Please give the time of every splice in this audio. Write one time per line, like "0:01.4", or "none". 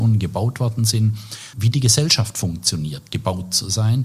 0:01.5